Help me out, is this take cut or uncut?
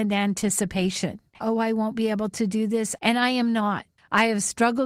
cut